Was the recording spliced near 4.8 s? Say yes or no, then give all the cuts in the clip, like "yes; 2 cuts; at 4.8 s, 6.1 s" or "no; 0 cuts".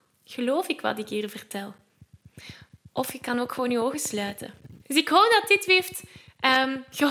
yes; 1 cut; at 4.8 s